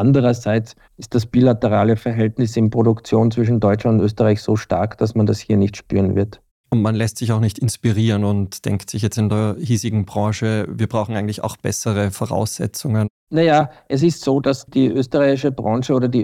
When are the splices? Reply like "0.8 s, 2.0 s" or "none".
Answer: none